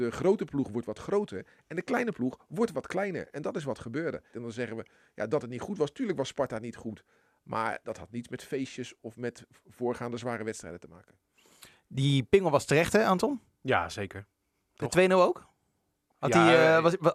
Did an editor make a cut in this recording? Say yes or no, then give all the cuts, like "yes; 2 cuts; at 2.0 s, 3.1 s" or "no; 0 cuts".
yes; 1 cut; at 4.3 s